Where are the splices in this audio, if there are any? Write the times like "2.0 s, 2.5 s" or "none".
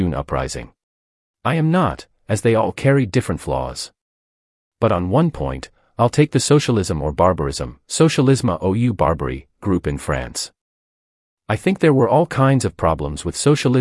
1.2 s